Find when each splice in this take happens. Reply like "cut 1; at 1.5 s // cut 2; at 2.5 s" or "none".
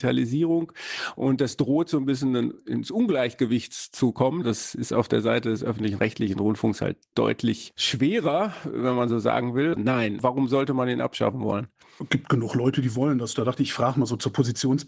cut 1; at 9.8 s